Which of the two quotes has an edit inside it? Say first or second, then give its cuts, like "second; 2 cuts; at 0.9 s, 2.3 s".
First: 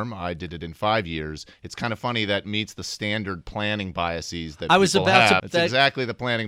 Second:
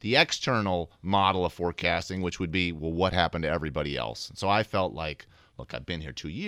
first; 1 cut; at 5.4 s